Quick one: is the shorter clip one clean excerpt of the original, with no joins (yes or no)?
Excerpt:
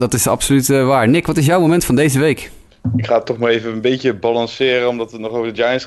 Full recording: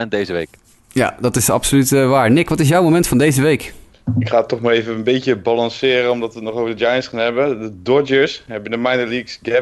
yes